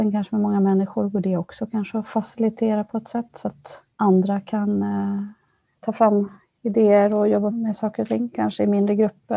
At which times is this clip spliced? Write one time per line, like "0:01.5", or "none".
0:03.9
0:07.5